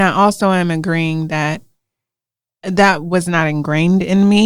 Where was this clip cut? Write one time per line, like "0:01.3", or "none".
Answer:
none